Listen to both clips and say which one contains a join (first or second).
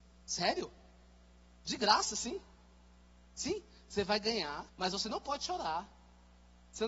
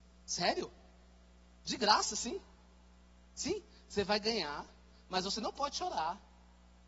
first